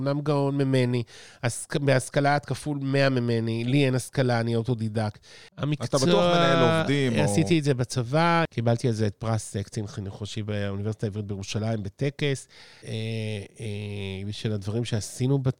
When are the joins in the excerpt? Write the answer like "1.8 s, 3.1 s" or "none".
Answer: 5.5 s, 8.5 s, 12.8 s